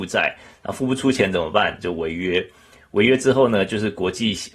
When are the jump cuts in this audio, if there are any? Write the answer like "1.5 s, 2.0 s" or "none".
none